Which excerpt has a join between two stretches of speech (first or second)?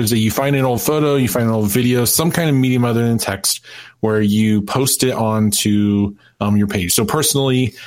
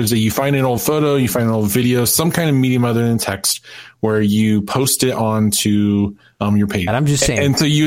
second